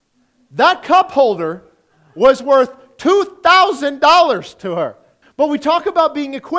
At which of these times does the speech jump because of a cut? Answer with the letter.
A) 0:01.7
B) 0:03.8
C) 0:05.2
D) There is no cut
C